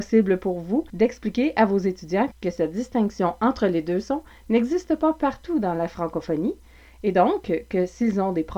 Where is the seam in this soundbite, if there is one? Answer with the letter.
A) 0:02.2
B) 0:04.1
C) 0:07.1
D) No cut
D